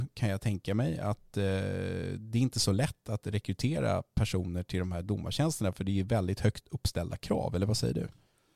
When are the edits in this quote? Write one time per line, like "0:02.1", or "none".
none